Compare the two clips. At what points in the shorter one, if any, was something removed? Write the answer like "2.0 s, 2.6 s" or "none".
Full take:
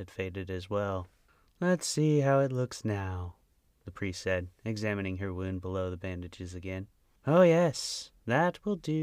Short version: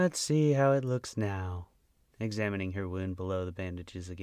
2.1 s